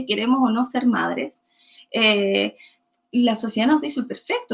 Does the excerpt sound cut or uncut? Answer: uncut